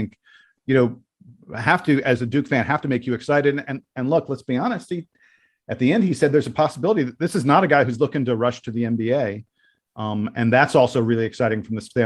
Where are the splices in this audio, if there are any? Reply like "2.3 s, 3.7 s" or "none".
none